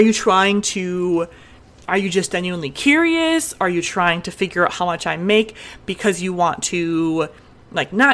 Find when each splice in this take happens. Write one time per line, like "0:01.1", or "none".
none